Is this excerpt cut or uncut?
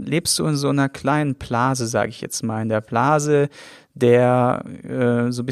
uncut